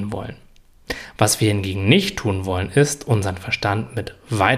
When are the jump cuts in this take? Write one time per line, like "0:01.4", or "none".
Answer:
none